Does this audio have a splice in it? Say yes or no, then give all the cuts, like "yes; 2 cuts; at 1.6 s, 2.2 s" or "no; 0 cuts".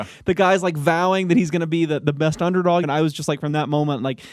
yes; 1 cut; at 2.8 s